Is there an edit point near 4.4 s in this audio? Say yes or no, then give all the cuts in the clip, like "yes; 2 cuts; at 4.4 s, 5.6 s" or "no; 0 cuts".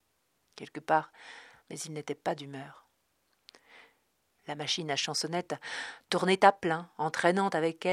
yes; 2 cuts; at 1.6 s, 4.4 s